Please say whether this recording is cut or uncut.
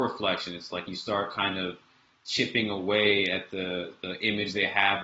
uncut